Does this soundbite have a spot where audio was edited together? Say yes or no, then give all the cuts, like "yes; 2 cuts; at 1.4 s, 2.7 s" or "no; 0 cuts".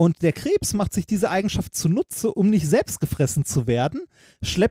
yes; 1 cut; at 2.3 s